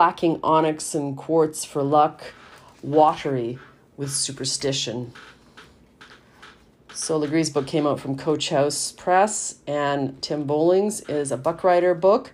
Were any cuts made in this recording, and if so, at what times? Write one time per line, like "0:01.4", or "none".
none